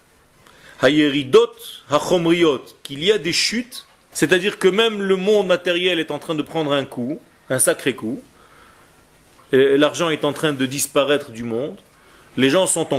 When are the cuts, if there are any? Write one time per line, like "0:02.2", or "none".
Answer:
0:04.1